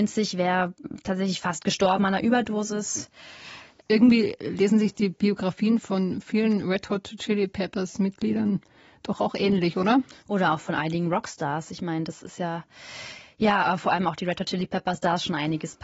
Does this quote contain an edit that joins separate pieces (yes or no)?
no